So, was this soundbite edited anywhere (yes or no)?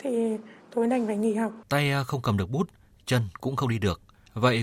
yes